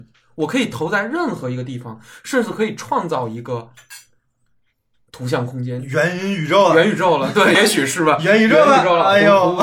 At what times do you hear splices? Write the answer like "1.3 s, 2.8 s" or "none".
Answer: 7.5 s